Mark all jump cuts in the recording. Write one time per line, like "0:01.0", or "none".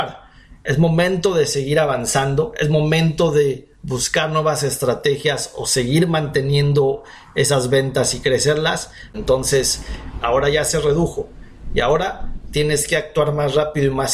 0:09.1
0:10.2